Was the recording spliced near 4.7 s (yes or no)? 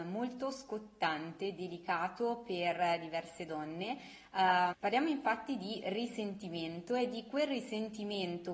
yes